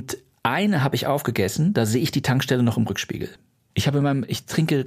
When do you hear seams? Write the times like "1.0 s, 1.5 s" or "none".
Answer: 3.7 s

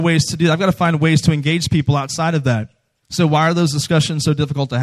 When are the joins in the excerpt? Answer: 3.0 s

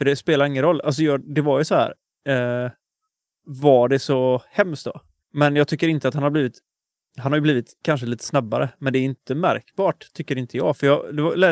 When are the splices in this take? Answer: 2.1 s, 5.2 s

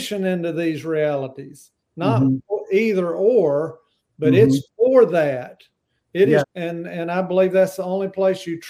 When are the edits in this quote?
6.4 s

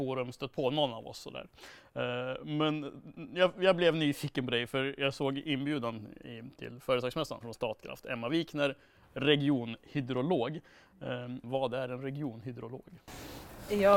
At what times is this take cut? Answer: 7.4 s, 11.4 s

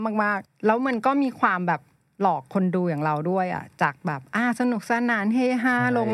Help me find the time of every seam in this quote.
none

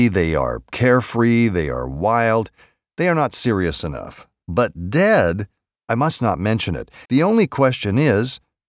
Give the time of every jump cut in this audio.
5.8 s, 7.1 s

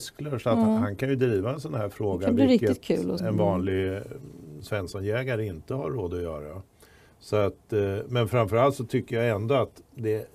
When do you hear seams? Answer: 3.2 s

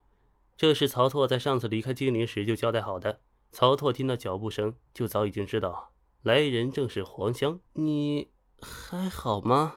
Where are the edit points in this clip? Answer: 3.3 s, 7.7 s

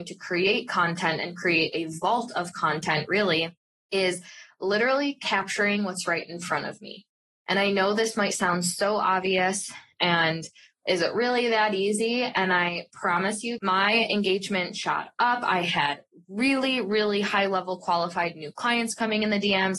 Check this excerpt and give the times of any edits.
13.6 s

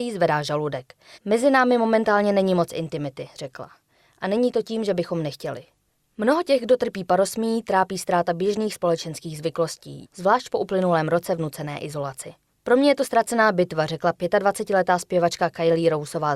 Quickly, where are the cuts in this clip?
1.1 s, 10.0 s

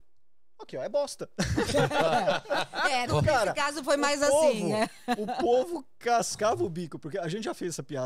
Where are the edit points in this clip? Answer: 3.1 s

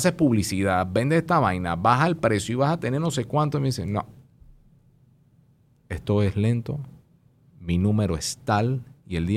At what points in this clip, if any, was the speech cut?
none

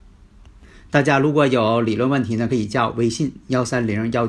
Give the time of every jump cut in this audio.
none

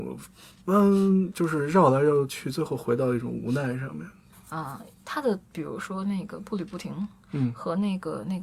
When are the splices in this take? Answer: 4.3 s

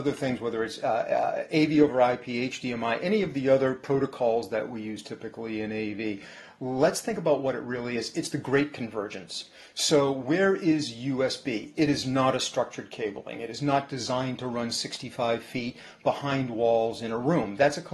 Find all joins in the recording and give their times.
11.8 s

